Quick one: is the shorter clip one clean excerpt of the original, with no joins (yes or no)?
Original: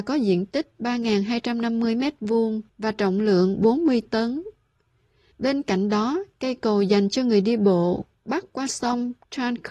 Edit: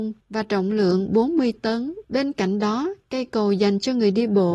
no